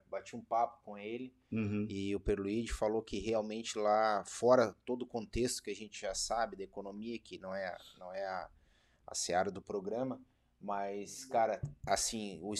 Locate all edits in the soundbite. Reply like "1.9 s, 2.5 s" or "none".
none